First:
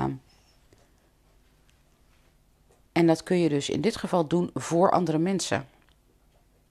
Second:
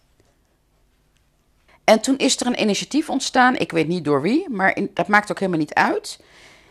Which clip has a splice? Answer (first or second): second